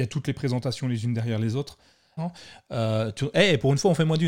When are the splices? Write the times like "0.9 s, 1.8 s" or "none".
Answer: 2.2 s